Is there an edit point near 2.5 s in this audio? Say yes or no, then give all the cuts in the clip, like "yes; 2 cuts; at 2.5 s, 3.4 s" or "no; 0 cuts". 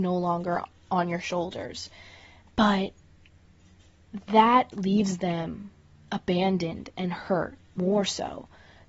yes; 3 cuts; at 2.5 s, 4.7 s, 7.8 s